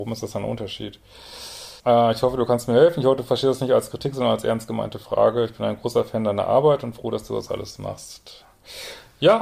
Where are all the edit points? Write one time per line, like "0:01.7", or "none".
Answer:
0:01.8

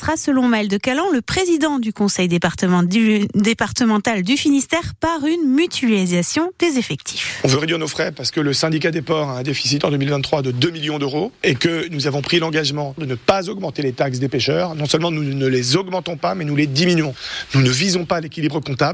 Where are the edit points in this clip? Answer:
none

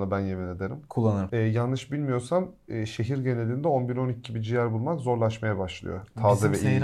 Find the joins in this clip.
0:01.3

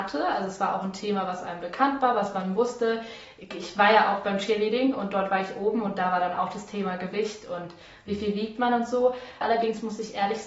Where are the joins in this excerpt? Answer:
0:09.4

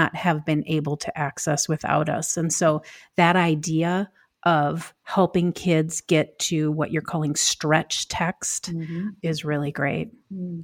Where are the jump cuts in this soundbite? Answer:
none

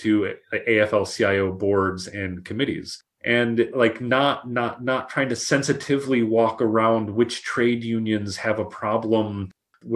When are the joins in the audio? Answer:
0:03.2

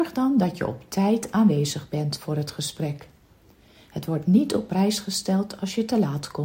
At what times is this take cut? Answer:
none

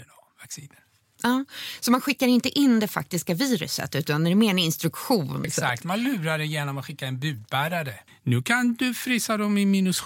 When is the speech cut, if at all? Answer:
0:05.4
0:08.1

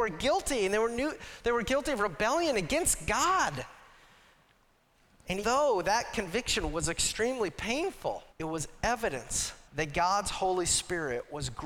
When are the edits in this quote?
0:05.4
0:08.3
0:09.6

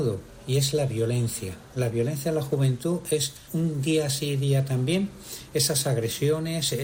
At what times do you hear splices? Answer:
0:03.5

